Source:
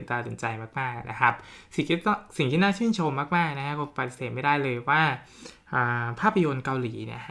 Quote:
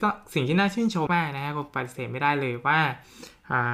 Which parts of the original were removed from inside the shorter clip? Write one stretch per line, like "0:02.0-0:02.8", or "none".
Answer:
0:03.1-0:03.3